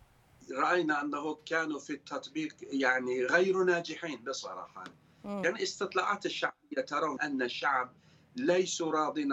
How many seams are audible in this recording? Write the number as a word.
one